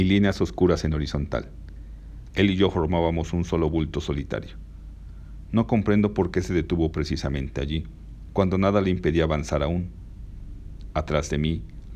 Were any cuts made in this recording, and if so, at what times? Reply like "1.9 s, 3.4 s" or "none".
2.3 s, 8.3 s